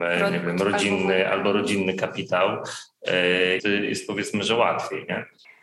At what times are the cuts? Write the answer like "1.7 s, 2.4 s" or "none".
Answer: 3.6 s

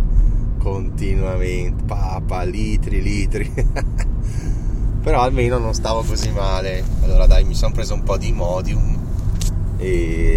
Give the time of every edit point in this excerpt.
1.8 s

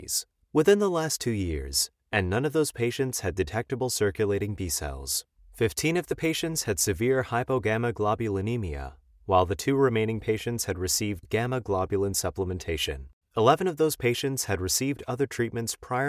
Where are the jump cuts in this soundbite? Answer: 13.2 s

